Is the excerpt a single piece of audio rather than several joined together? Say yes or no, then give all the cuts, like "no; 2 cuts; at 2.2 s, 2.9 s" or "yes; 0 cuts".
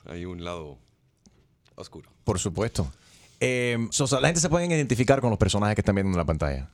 no; 1 cut; at 3.9 s